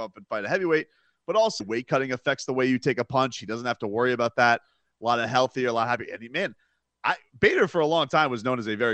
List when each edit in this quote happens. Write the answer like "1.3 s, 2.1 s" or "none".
1.6 s

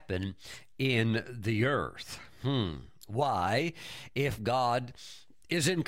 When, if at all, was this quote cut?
none

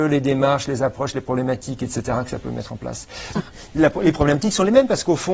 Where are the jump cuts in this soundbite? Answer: 3.4 s

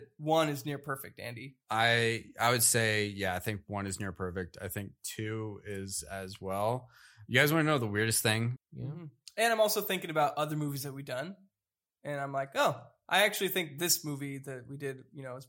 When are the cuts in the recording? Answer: 8.6 s

